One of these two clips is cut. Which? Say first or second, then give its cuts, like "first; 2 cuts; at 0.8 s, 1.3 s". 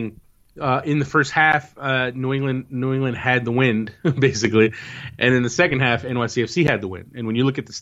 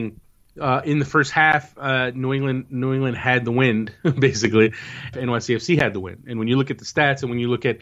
second; 1 cut; at 5.1 s